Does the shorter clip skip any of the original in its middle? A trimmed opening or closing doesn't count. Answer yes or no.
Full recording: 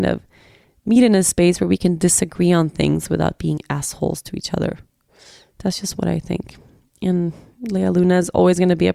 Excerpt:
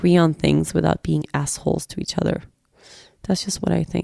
no